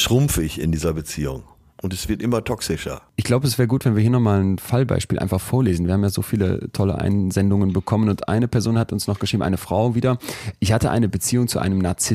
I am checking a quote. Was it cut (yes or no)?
no